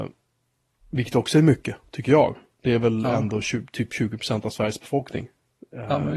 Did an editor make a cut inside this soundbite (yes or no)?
no